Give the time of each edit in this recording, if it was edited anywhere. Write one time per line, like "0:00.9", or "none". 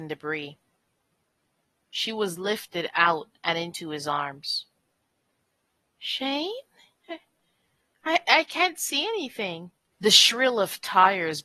0:08.2
0:09.9